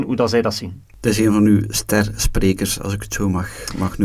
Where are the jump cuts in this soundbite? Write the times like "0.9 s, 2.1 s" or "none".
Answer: none